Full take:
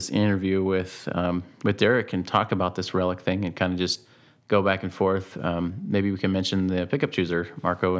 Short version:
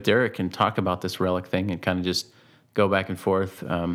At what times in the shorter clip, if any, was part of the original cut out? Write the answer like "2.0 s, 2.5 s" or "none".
none